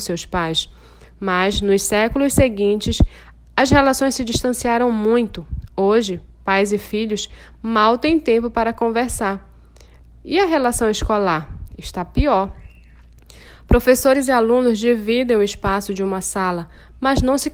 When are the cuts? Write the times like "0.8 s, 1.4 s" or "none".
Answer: none